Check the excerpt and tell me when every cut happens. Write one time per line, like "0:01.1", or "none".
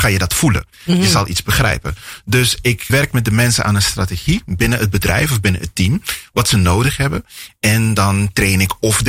0:02.9